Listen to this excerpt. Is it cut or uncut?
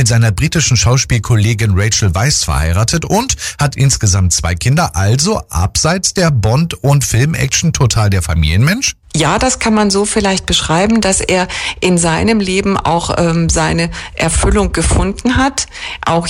uncut